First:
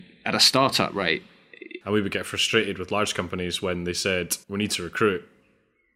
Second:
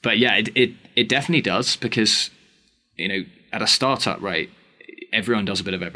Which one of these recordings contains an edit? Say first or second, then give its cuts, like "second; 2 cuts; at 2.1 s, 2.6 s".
first; 2 cuts; at 1.8 s, 4.4 s